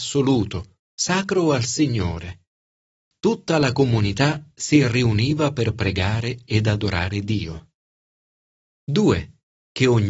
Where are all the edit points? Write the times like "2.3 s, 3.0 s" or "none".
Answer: 3.0 s